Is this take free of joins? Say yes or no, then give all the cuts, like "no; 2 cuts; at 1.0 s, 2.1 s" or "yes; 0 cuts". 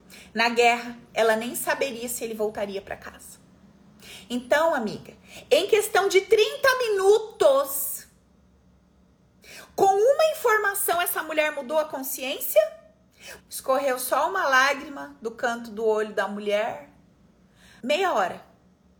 no; 2 cuts; at 13.4 s, 17.8 s